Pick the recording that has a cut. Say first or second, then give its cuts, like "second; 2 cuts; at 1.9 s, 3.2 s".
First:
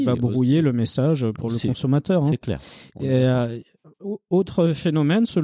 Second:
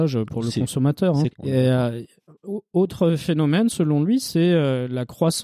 second; 1 cut; at 1.3 s